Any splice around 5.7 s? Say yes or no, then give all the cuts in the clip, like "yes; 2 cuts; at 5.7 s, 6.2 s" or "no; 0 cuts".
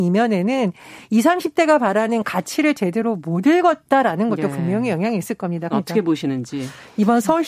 yes; 1 cut; at 5.7 s